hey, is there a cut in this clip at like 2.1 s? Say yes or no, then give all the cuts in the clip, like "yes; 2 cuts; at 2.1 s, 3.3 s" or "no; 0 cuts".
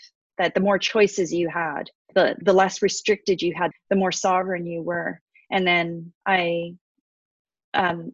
yes; 2 cuts; at 2.1 s, 3.7 s